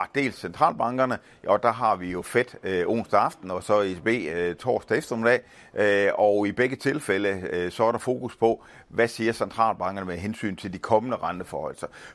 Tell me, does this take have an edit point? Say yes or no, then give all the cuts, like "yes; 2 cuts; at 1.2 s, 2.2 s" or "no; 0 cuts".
no; 0 cuts